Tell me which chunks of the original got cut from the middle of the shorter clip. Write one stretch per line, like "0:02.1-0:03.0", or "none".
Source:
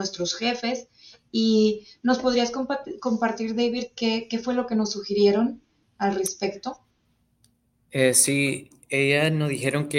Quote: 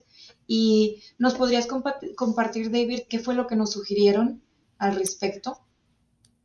0:03.9-0:04.3

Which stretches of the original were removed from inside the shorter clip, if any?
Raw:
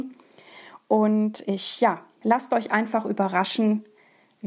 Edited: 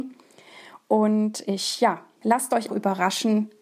0:02.7-0:03.0

